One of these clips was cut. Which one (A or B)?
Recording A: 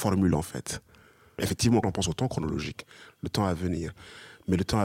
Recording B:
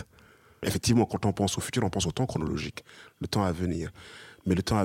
A